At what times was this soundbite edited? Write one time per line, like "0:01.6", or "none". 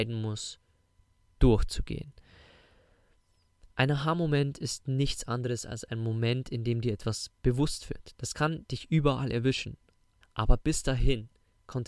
0:08.2
0:10.2